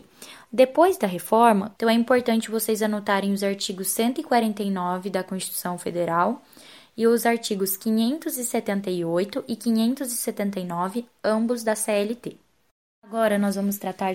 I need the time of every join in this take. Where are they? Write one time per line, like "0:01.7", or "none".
0:01.8

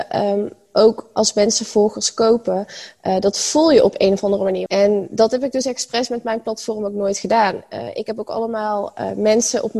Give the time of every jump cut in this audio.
0:04.7

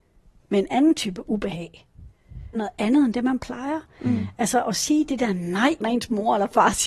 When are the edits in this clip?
0:02.5
0:05.8

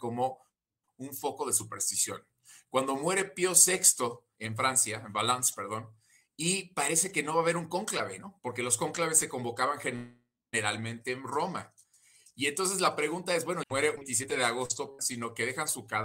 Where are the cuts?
0:04.4
0:13.6
0:15.0

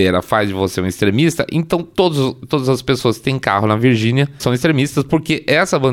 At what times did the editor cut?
0:04.4

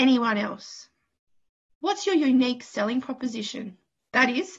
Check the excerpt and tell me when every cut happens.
0:01.7

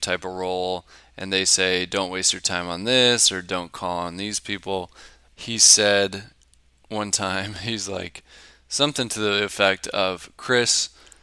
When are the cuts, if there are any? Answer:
0:05.3

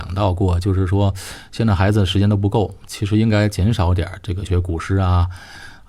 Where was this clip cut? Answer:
0:04.5

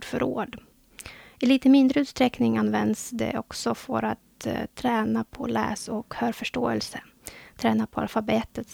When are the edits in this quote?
none

